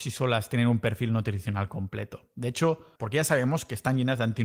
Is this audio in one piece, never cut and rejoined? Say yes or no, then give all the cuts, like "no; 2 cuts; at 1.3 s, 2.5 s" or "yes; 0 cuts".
no; 1 cut; at 3.0 s